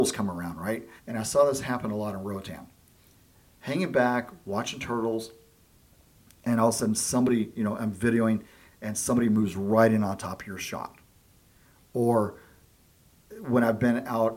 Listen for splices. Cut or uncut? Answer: cut